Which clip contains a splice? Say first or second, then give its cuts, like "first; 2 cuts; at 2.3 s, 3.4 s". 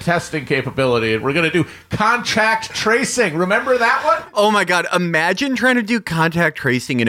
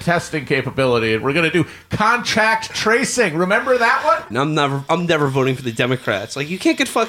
second; 1 cut; at 4.3 s